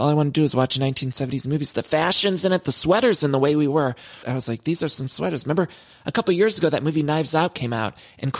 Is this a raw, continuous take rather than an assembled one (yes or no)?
no